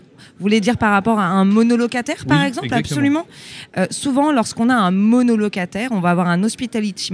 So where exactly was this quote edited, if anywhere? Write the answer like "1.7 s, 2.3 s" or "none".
none